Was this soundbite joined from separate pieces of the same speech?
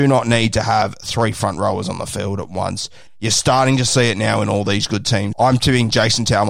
yes; 2 cuts; at 3.1 s, 5.3 s

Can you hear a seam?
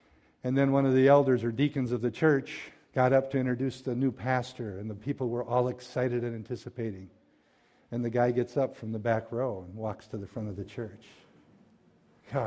no; 0 cuts

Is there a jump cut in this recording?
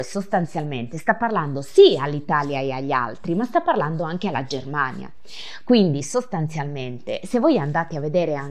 yes; 1 cut; at 5.6 s

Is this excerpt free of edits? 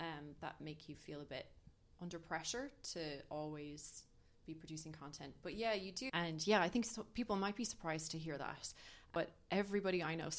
no; 1 cut; at 6.1 s

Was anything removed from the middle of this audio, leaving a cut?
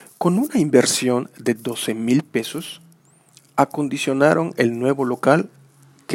no; 0 cuts

